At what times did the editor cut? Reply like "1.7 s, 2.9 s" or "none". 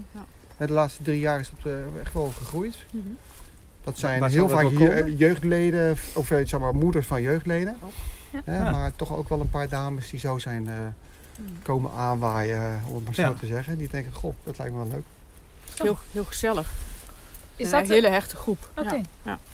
none